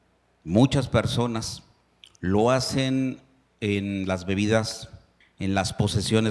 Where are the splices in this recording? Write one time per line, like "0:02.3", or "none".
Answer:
0:05.2